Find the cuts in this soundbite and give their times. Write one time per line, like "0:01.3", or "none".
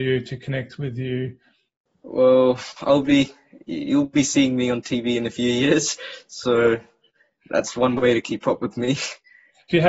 none